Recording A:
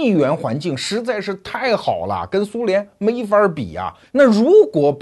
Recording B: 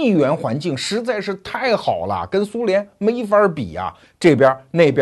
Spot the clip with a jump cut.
A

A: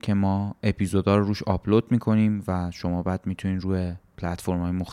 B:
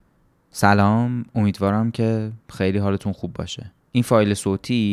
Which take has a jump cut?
B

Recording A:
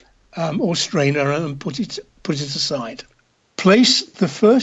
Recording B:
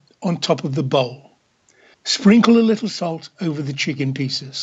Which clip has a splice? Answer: B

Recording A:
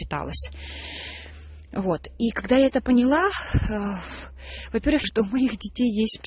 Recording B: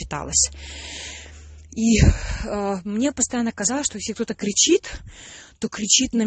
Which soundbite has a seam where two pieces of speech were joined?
A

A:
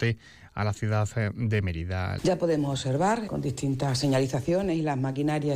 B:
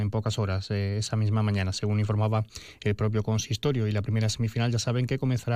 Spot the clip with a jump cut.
A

